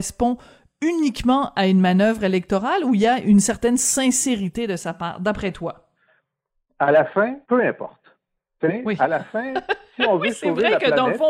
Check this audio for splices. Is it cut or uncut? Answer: cut